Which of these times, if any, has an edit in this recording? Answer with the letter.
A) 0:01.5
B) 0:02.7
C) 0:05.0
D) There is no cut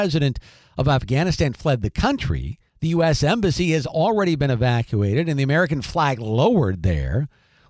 B